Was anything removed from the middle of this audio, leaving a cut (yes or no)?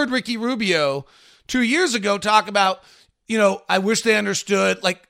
no